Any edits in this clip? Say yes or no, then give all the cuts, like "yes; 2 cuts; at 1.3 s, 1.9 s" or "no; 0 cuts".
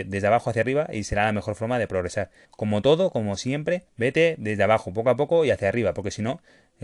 yes; 2 cuts; at 2.4 s, 3.9 s